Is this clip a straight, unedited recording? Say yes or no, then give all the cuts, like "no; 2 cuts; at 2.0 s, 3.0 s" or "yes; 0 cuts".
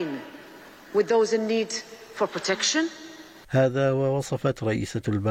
no; 1 cut; at 3.4 s